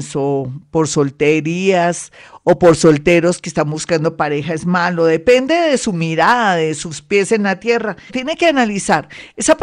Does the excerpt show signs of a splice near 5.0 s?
no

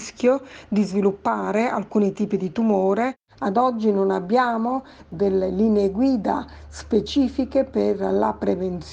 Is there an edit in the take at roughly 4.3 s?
no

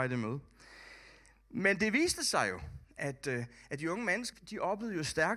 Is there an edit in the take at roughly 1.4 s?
no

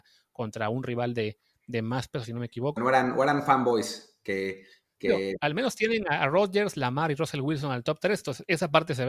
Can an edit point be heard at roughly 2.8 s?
yes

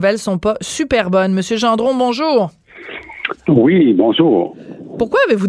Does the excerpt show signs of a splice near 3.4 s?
no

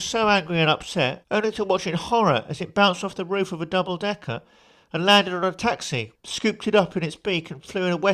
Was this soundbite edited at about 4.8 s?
no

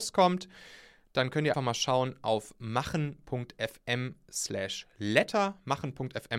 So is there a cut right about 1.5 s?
yes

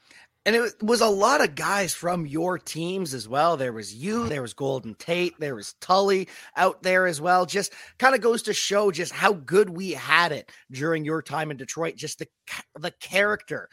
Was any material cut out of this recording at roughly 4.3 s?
yes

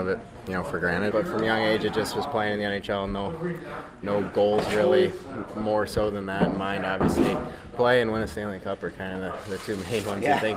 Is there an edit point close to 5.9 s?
no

